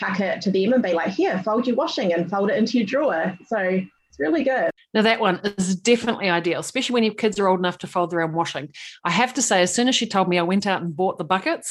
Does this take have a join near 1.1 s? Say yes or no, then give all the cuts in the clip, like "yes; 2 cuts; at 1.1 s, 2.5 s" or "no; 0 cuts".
no; 0 cuts